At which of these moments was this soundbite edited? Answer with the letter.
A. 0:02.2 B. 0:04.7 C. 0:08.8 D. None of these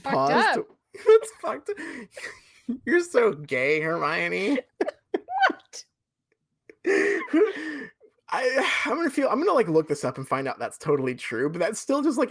B